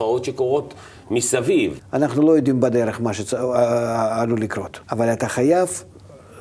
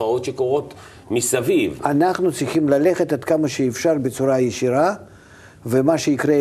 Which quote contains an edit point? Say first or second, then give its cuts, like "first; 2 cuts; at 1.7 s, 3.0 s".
first; 2 cuts; at 1.8 s, 4.8 s